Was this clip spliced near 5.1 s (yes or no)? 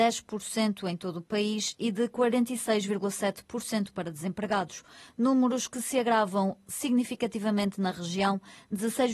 no